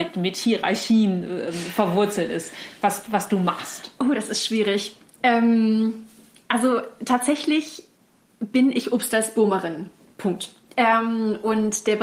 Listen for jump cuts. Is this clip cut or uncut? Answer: uncut